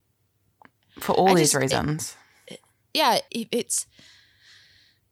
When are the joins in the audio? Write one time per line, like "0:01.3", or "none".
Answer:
0:03.3